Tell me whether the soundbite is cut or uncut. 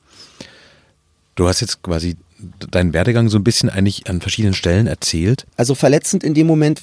cut